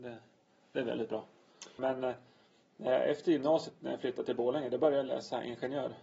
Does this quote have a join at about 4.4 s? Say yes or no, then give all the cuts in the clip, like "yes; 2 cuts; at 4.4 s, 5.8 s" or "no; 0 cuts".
no; 1 cut; at 1.8 s